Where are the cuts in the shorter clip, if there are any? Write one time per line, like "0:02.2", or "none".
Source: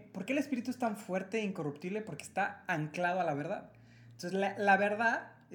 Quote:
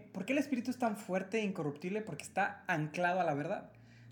none